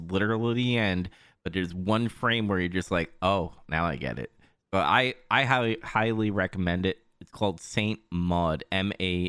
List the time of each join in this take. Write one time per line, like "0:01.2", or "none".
none